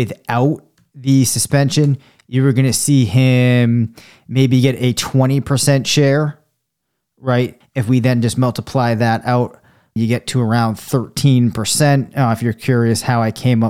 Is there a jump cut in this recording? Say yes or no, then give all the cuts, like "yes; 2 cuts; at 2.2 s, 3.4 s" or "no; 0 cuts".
yes; 2 cuts; at 7.6 s, 10.0 s